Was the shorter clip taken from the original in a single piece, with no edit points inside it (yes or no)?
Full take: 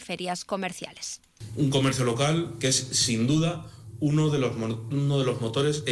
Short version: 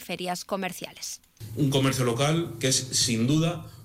yes